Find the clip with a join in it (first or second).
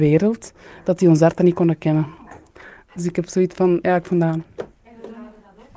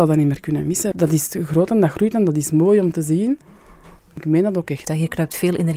second